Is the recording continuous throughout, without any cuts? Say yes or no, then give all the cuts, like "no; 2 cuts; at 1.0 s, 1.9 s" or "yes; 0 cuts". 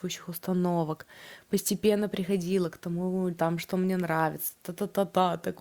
yes; 0 cuts